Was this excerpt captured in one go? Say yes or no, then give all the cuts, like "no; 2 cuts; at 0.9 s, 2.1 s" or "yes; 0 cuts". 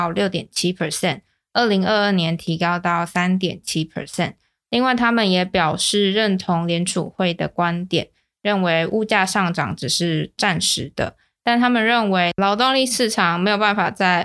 yes; 0 cuts